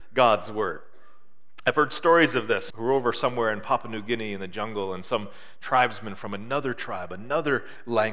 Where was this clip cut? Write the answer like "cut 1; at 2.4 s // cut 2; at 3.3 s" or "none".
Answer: cut 1; at 2.7 s